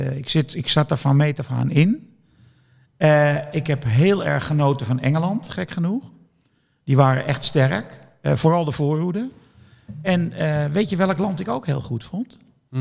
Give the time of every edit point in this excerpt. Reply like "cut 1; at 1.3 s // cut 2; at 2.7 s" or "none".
none